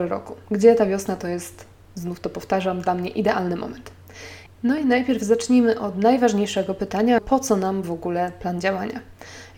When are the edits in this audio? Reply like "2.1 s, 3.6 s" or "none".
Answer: 4.5 s, 7.2 s